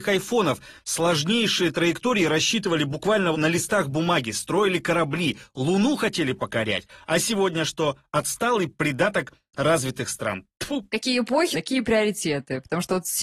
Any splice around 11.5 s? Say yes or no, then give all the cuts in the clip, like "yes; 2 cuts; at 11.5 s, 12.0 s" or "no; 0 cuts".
yes; 2 cuts; at 3.3 s, 11.5 s